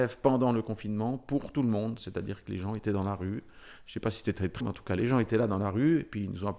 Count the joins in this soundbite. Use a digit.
1